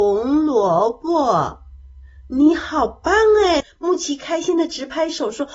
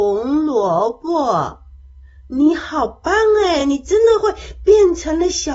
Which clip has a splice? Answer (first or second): first